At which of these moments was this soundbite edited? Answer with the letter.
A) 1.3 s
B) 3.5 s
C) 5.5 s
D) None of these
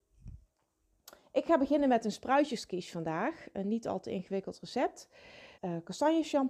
C